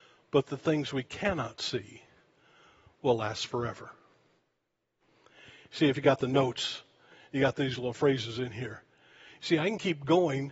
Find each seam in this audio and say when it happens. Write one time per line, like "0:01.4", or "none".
none